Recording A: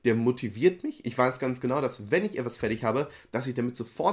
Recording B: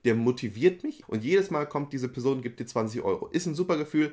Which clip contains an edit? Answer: B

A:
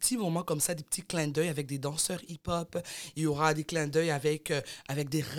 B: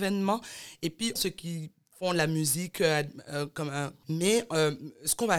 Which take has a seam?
B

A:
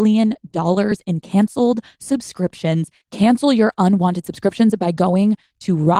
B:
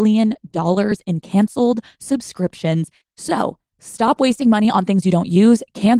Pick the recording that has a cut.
A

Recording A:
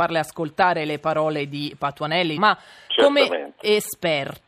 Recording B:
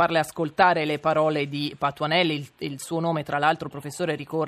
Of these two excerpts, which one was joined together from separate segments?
A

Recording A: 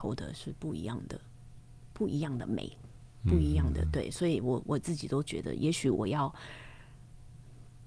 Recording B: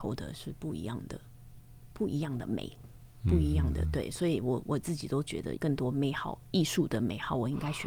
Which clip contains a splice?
B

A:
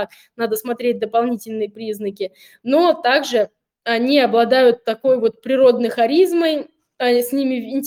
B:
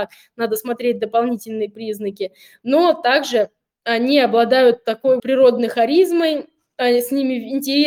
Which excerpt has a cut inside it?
B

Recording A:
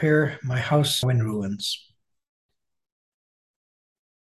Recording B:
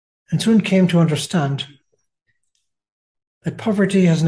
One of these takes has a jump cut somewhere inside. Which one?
A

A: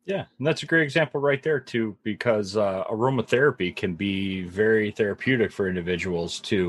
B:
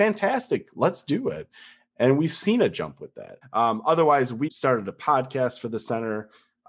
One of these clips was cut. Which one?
B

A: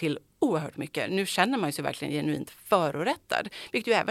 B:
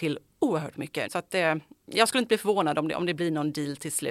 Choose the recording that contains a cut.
B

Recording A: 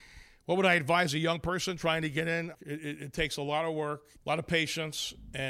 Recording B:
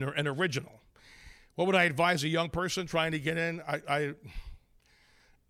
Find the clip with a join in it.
A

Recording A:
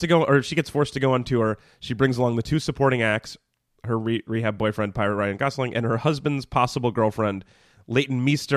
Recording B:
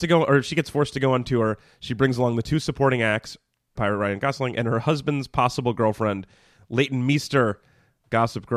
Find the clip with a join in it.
B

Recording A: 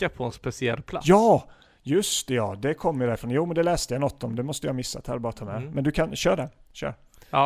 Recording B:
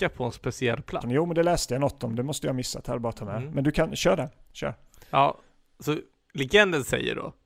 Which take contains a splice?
B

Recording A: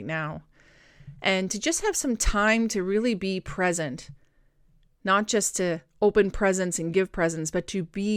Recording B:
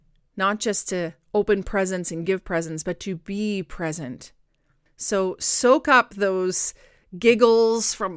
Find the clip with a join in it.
B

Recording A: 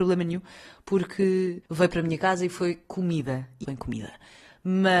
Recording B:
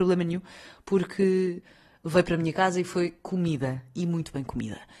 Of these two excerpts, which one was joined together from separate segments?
A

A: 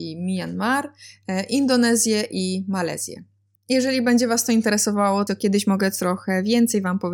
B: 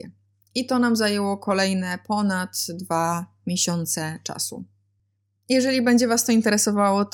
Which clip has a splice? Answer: A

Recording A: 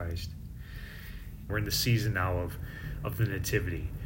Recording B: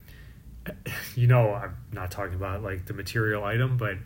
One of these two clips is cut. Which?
A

